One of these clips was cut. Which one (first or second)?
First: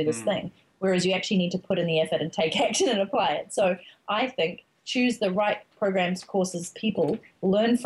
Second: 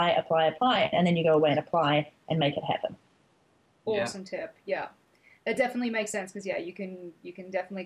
second